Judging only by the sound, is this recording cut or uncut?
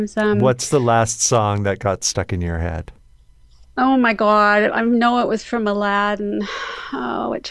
uncut